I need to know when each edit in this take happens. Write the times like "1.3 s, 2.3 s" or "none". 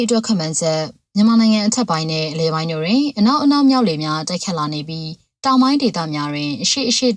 none